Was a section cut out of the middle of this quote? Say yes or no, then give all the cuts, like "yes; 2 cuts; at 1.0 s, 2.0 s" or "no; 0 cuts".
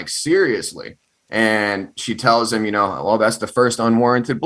no; 0 cuts